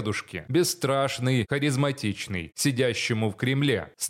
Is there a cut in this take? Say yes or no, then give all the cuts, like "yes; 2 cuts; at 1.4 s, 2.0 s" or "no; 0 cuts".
yes; 2 cuts; at 1.5 s, 2.5 s